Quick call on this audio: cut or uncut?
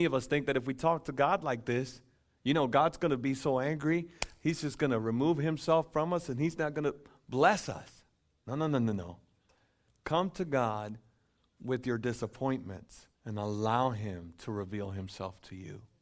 cut